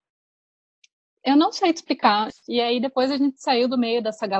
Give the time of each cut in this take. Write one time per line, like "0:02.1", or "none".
0:02.3